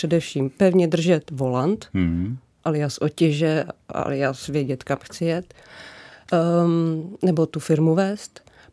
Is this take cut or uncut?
uncut